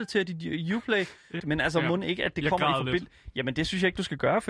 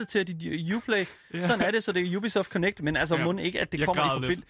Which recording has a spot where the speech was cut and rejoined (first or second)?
first